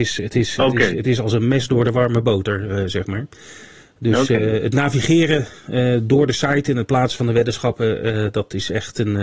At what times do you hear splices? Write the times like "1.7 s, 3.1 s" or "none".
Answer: none